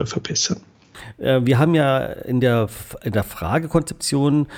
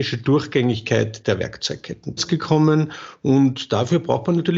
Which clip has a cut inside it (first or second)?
second